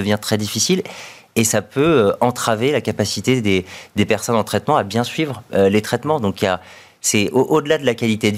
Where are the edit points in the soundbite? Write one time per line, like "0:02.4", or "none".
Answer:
none